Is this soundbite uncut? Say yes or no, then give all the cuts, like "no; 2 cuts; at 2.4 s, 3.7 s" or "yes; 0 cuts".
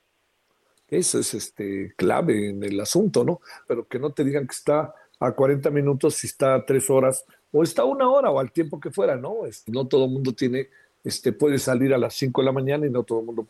no; 2 cuts; at 3.7 s, 9.7 s